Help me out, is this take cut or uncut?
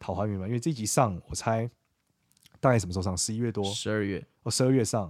uncut